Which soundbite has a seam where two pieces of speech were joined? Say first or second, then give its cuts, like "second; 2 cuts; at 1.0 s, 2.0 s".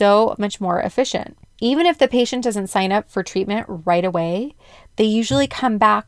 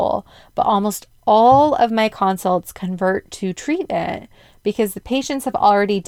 first; 1 cut; at 1.4 s